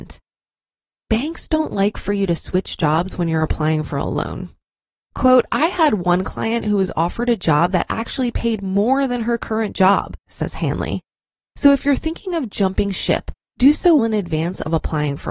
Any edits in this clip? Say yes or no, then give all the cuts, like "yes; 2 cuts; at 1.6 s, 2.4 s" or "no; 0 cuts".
yes; 2 cuts; at 10.3 s, 14.0 s